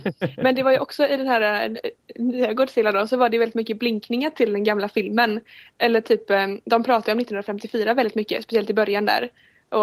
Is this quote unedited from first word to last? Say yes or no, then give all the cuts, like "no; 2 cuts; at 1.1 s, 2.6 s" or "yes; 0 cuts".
yes; 0 cuts